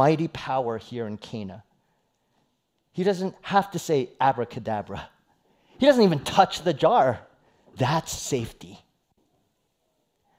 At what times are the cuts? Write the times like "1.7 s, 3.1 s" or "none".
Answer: 7.7 s